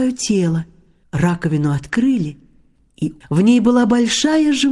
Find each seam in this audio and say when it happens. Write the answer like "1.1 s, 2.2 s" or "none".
1.0 s, 3.2 s